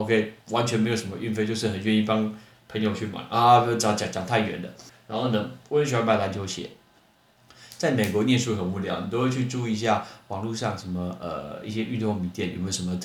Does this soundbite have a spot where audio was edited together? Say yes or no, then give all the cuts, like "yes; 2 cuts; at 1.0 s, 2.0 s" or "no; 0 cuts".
yes; 1 cut; at 4.9 s